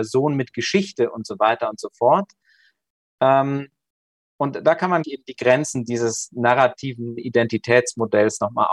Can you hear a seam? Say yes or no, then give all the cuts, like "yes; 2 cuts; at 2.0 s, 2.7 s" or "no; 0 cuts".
yes; 1 cut; at 5.0 s